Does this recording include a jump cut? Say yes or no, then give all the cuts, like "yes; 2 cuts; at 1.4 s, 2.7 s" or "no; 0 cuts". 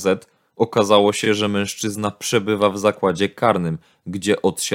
no; 0 cuts